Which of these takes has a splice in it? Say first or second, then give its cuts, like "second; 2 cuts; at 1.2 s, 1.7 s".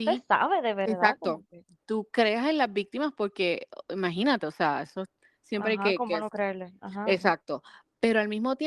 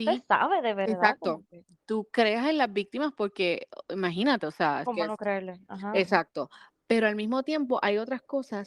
second; 1 cut; at 4.9 s